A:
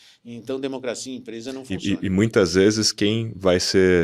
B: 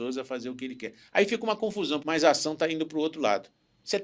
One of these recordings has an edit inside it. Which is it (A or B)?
B